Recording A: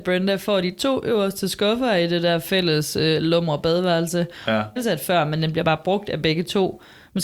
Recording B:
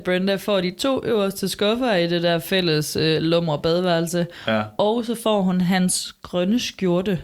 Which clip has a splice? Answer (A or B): A